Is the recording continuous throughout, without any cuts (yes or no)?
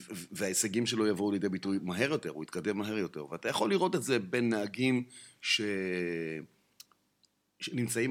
yes